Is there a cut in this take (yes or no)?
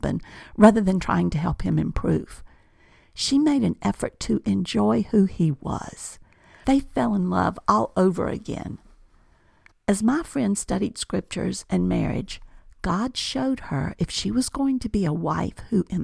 yes